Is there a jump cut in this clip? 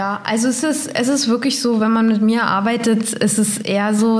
no; 0 cuts

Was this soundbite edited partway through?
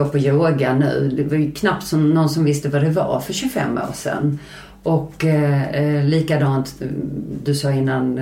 no; 0 cuts

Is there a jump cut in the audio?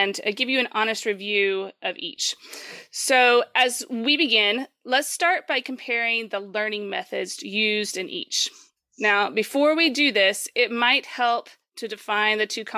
no; 0 cuts

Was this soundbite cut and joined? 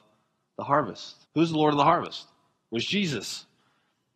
yes; 1 cut; at 1.2 s

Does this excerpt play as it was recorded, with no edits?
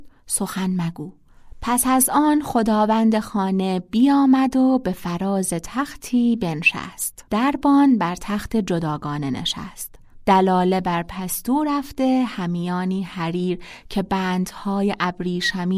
no; 1 cut; at 7.3 s

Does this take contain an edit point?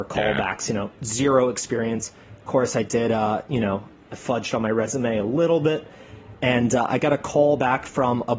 no; 0 cuts

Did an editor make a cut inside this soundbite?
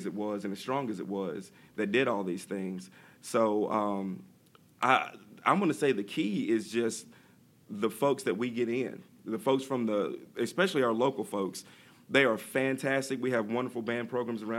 no; 0 cuts

